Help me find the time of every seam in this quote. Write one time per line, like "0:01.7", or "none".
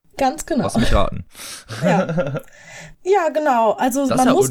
0:02.9